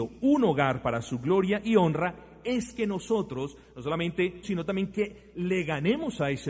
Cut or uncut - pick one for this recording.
cut